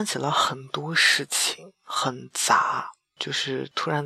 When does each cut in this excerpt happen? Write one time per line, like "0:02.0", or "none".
0:03.2

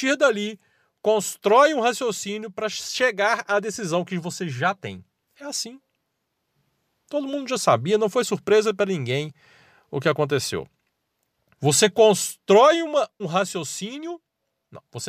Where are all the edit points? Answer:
0:11.6
0:13.2

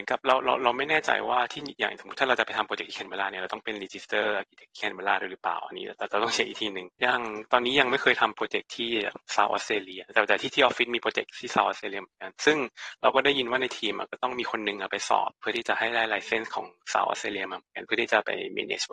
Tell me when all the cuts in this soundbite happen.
0:06.9

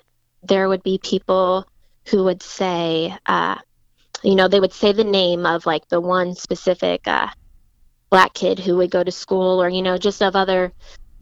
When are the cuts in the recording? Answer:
none

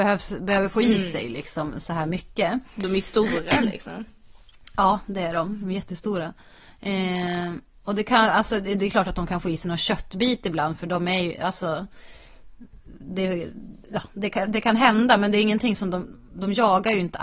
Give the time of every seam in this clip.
none

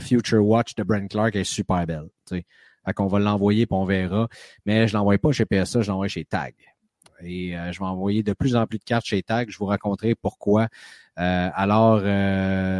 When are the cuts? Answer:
none

